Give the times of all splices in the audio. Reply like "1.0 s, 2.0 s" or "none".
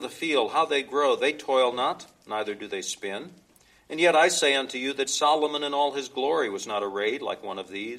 5.1 s